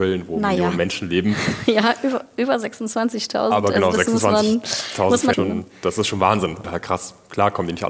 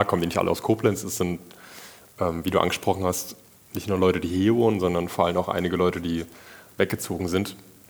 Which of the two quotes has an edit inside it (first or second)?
first